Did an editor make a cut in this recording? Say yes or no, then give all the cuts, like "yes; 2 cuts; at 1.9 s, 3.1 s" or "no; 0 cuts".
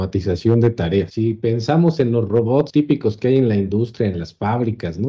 no; 0 cuts